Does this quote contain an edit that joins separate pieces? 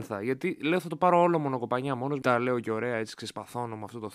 yes; 1 cut; at 2.2 s

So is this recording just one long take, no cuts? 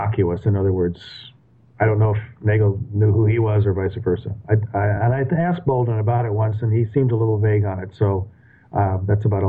yes; 0 cuts

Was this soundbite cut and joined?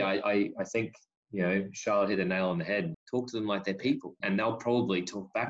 yes; 2 cuts; at 2.9 s, 4.2 s

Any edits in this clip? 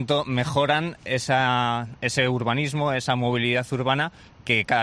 no; 0 cuts

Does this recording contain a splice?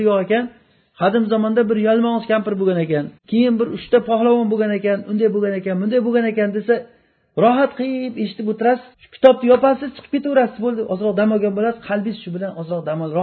yes; 2 cuts; at 3.2 s, 8.9 s

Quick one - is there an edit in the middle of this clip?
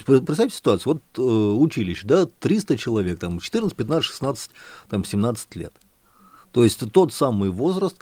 no; 0 cuts

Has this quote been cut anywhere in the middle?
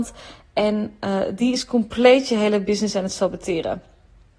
no; 0 cuts

